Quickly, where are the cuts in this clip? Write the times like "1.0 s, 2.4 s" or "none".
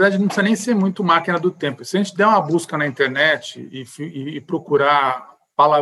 none